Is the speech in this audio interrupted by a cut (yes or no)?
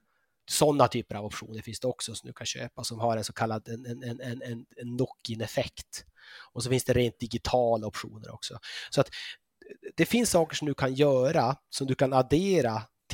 no